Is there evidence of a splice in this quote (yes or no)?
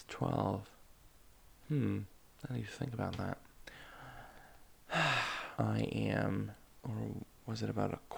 yes